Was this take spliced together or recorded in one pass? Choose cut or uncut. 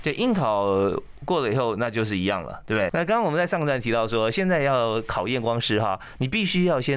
cut